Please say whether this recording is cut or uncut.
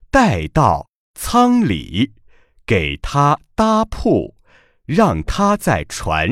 uncut